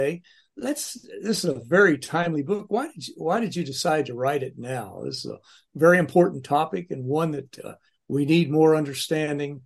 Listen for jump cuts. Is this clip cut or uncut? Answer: uncut